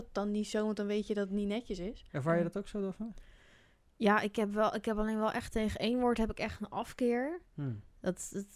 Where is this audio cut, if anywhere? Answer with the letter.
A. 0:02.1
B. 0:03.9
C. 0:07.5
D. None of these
A